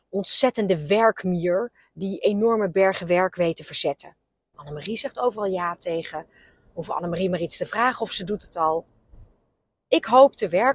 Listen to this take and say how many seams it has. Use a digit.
1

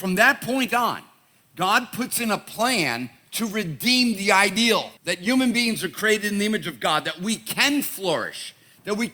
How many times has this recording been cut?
1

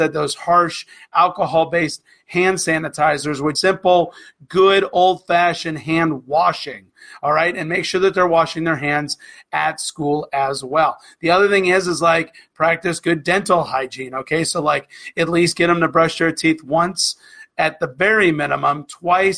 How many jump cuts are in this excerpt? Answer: 1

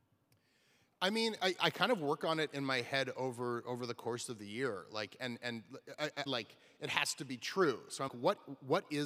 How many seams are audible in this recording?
2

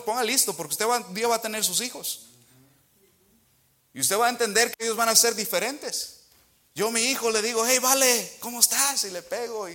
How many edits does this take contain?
1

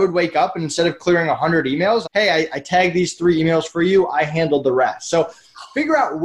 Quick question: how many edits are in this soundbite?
1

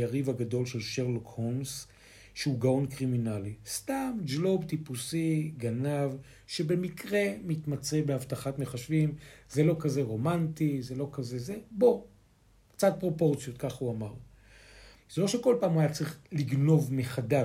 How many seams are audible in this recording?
1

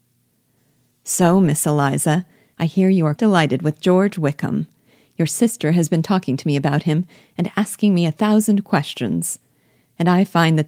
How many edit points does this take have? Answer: 1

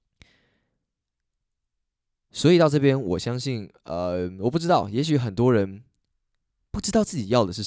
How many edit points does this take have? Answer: 0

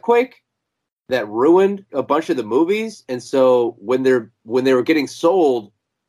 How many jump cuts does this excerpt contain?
1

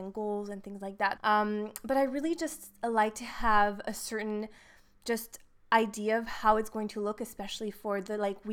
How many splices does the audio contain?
1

